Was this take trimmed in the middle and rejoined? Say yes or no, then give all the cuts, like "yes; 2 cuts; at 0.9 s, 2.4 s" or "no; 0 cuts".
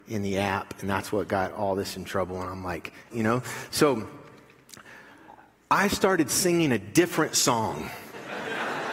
yes; 1 cut; at 3.1 s